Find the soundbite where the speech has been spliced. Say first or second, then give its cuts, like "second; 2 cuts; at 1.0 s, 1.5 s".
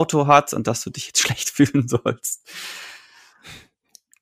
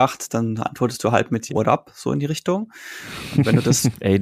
second; 1 cut; at 1.5 s